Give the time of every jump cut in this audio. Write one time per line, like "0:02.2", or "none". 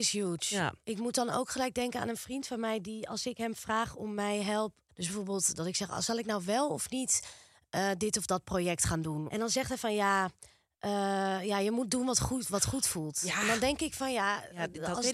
0:04.9
0:09.3